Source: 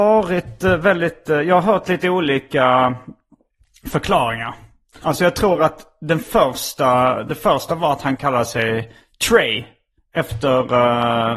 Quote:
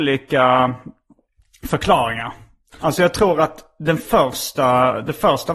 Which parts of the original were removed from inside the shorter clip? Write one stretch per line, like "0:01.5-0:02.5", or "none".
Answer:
none